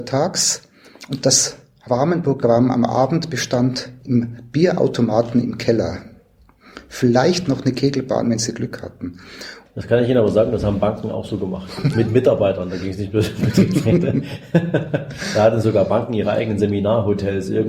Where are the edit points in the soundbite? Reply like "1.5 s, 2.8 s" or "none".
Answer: 9.7 s